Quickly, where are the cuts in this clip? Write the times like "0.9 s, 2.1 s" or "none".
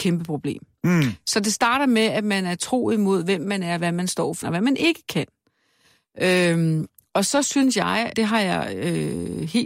4.4 s, 8.1 s

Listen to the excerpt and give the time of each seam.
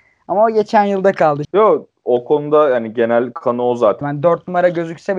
1.4 s, 4.0 s

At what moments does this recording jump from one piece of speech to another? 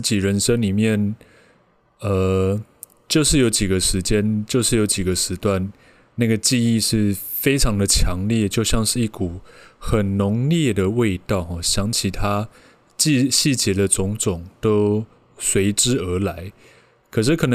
none

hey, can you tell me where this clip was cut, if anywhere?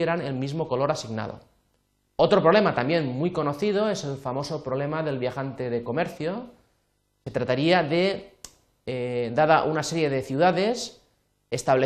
2.1 s

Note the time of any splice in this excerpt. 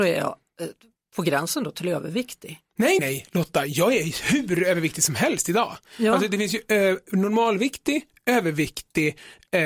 3.0 s

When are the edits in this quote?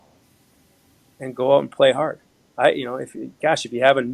none

